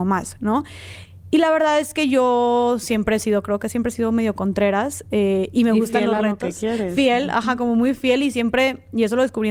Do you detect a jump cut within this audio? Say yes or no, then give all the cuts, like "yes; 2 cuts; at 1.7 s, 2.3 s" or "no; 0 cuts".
no; 0 cuts